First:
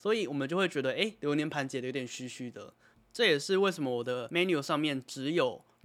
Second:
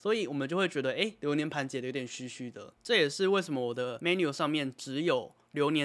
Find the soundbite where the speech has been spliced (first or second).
second